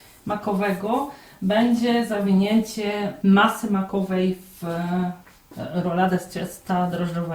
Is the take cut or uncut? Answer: uncut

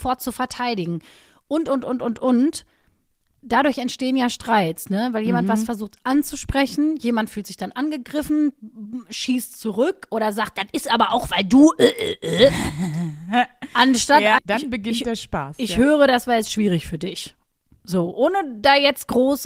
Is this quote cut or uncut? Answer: cut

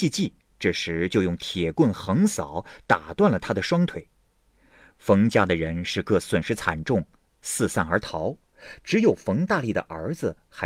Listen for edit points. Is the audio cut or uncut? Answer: cut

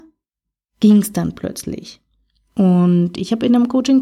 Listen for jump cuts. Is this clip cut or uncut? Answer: uncut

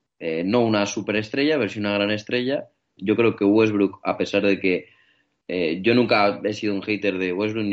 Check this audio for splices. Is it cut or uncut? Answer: cut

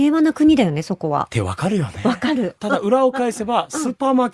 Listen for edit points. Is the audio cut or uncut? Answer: cut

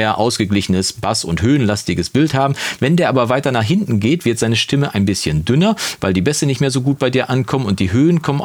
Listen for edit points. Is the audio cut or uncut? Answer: uncut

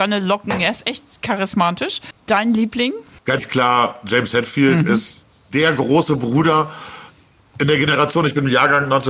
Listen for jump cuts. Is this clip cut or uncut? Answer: uncut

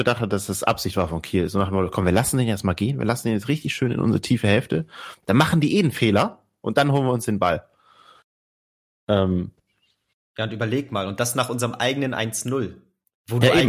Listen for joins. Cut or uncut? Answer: uncut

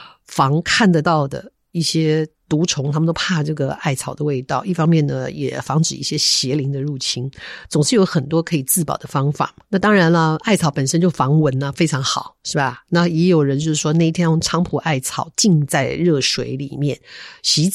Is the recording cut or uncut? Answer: uncut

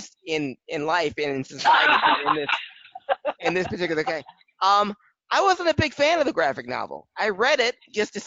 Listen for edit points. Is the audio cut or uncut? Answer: uncut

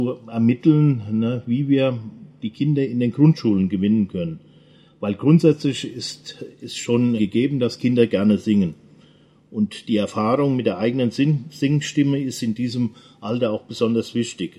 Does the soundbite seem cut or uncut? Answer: cut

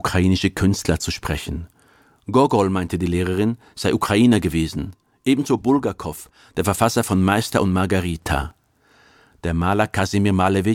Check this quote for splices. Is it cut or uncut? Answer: uncut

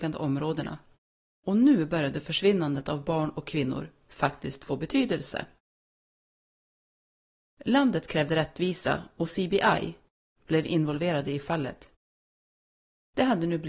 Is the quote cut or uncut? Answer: cut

